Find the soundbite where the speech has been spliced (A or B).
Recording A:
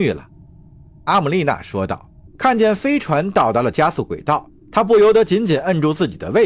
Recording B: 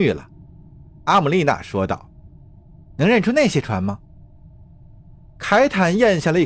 A